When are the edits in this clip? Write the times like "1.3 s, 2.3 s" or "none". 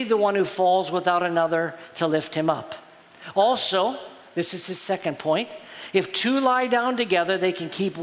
none

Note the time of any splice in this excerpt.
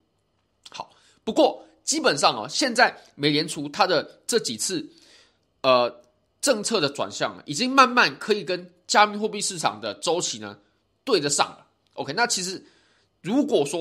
none

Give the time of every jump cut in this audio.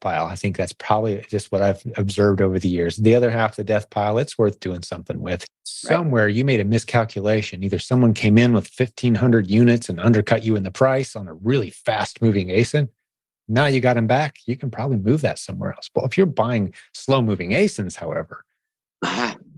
5.5 s

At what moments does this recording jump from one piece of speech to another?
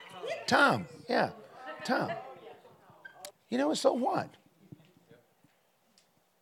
3.3 s

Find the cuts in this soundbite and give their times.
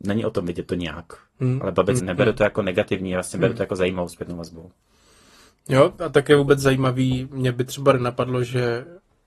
2.0 s

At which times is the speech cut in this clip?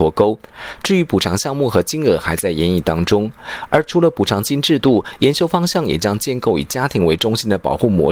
none

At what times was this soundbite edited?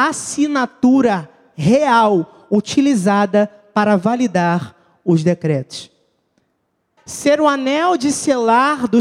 7.0 s

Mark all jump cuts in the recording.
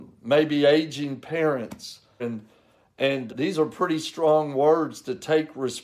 2.2 s, 3.3 s

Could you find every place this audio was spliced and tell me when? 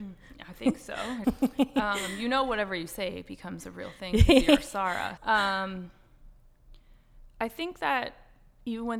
1.2 s, 5.2 s

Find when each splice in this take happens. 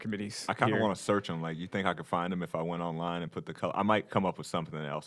none

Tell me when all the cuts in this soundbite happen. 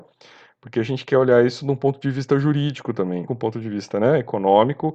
3.3 s

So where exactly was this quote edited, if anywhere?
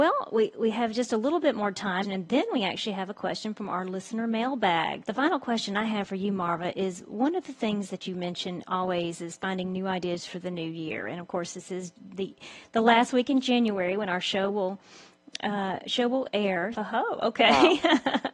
2.0 s, 5.0 s, 16.7 s

